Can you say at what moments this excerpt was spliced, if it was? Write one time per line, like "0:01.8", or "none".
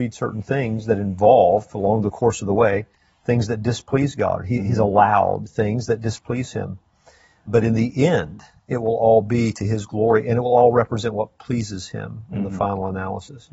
none